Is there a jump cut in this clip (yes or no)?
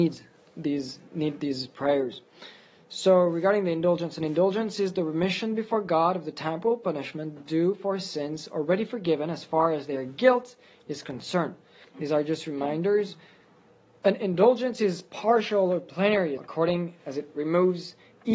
yes